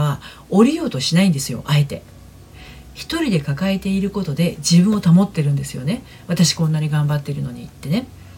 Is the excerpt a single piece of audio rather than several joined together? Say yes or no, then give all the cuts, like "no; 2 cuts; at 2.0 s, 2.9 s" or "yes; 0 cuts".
yes; 0 cuts